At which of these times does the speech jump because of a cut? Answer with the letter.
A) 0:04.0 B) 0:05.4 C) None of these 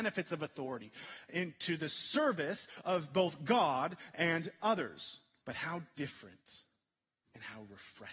B